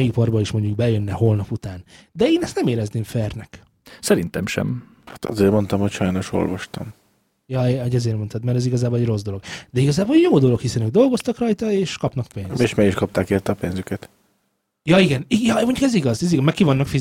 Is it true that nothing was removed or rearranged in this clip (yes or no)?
yes